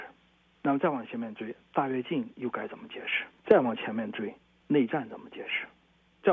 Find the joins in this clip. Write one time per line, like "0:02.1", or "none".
0:03.4